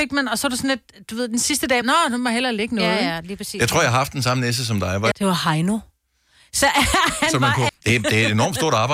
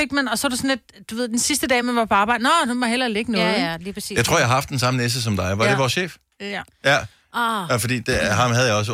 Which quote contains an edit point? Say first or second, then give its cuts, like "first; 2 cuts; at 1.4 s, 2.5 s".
first; 3 cuts; at 1.8 s, 5.1 s, 7.7 s